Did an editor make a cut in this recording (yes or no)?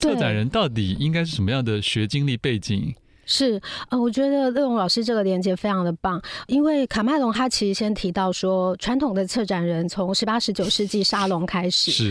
no